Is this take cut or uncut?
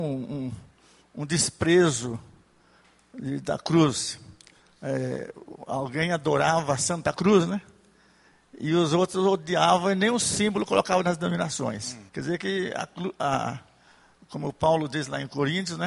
cut